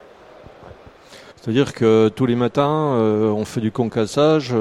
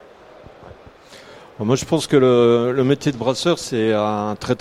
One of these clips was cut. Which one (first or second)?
first